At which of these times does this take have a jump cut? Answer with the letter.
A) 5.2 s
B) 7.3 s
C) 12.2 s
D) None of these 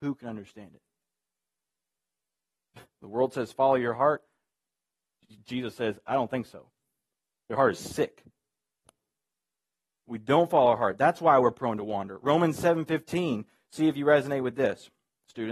D